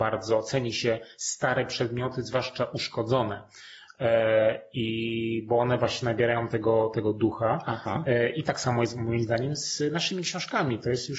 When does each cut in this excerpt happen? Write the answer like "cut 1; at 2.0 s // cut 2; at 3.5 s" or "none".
none